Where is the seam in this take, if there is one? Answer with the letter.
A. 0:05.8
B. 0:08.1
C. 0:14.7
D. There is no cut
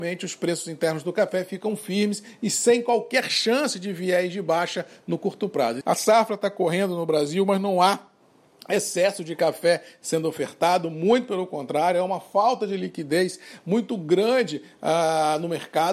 A